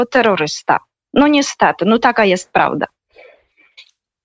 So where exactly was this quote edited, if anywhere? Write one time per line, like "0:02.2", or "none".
none